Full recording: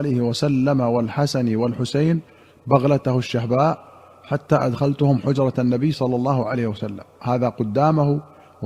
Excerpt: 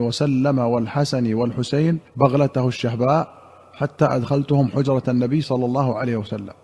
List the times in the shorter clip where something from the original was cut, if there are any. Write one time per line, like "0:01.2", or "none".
0:02.1